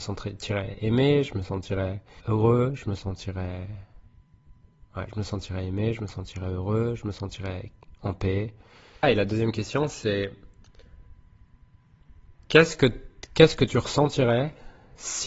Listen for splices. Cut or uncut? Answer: cut